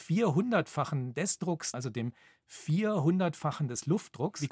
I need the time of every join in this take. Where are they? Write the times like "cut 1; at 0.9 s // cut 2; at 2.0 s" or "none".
cut 1; at 1.7 s